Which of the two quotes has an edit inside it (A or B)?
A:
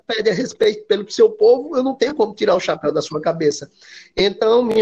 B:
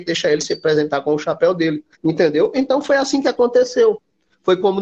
B